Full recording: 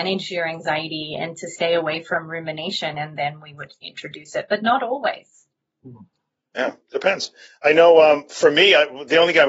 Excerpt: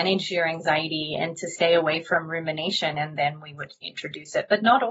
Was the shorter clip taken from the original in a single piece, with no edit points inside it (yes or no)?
yes